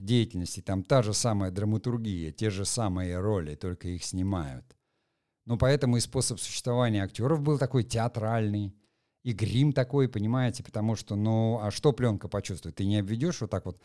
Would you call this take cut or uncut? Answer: uncut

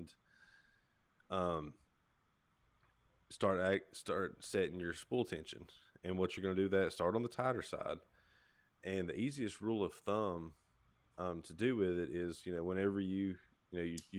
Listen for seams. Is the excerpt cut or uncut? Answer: uncut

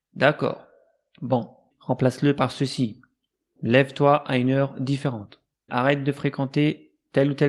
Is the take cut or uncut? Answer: cut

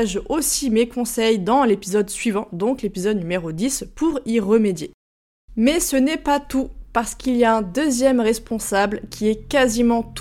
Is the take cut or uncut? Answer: uncut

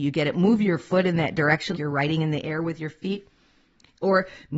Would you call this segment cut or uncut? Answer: cut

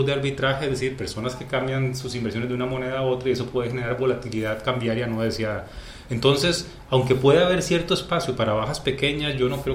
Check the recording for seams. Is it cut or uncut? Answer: uncut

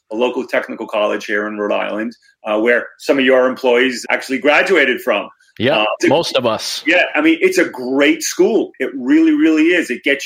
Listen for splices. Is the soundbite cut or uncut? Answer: cut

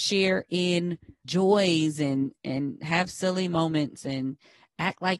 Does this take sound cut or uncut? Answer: cut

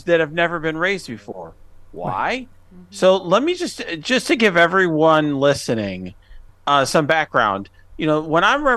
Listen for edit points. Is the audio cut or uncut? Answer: cut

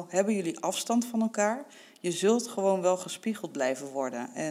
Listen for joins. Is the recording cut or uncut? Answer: uncut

